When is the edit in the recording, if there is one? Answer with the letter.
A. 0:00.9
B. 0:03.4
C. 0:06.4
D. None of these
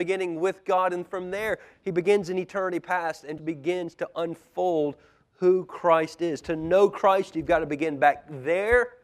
B